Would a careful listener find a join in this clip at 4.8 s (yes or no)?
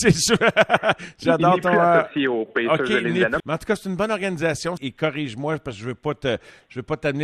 yes